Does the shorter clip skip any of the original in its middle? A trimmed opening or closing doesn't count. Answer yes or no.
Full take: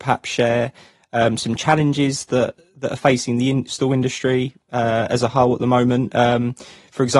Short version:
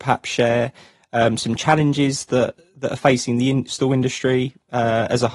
no